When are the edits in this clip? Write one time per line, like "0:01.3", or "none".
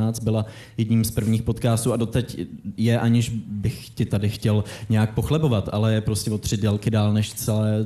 none